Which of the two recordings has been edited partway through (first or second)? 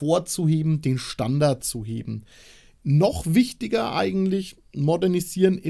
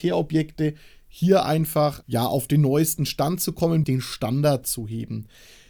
second